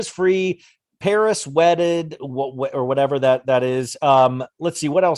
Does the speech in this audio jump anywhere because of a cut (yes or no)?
no